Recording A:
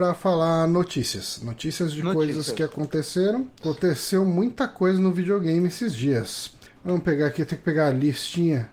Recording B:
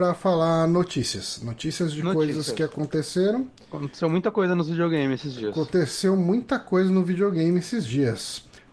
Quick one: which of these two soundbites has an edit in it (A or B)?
A